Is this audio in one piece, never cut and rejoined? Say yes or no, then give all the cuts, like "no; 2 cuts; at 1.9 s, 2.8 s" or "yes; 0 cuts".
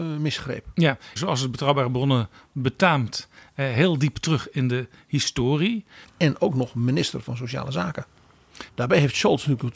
no; 3 cuts; at 1.2 s, 6.0 s, 8.7 s